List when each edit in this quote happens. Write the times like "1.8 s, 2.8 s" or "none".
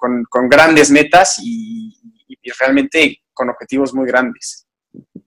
none